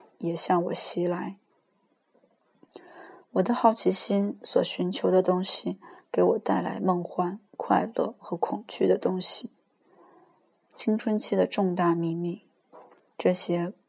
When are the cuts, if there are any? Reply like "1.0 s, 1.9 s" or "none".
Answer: none